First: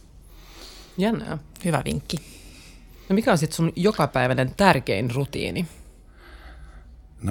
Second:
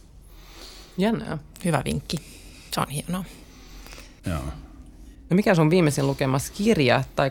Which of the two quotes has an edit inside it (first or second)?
second